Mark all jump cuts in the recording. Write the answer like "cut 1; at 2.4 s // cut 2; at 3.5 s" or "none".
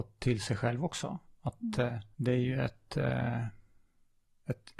cut 1; at 2.1 s